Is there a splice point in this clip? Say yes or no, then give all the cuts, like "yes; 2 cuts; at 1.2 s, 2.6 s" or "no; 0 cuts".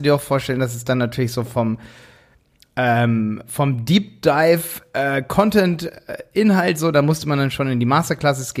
no; 0 cuts